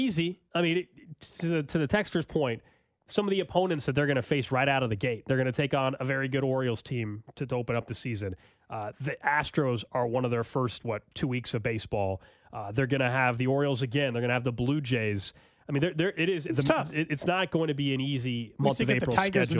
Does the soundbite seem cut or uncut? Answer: uncut